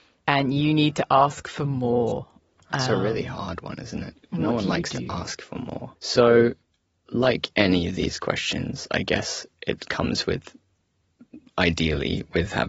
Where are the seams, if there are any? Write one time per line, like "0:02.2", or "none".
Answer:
0:05.9